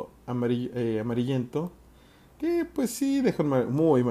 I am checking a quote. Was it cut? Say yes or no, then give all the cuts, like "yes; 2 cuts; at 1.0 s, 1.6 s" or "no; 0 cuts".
no; 0 cuts